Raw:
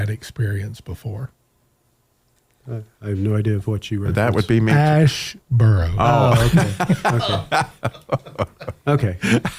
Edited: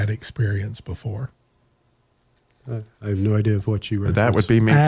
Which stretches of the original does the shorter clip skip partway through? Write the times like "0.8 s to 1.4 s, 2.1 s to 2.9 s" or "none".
none